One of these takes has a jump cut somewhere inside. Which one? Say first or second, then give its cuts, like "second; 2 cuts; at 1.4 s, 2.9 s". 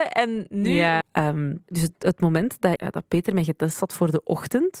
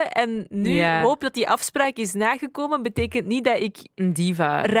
first; 2 cuts; at 1.0 s, 2.8 s